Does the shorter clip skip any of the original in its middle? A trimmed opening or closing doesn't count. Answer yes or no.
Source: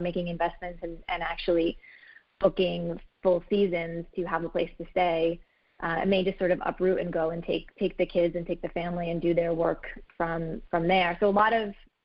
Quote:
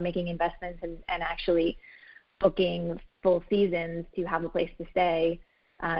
no